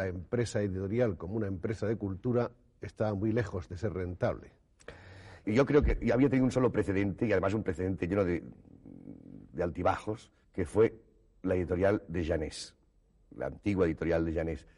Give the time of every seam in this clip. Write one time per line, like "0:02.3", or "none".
0:05.4
0:10.4